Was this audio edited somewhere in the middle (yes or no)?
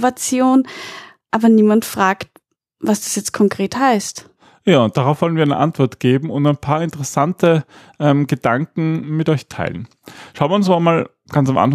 no